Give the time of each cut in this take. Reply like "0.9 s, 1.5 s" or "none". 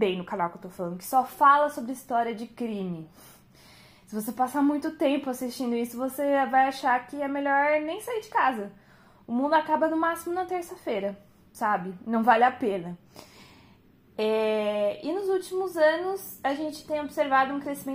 none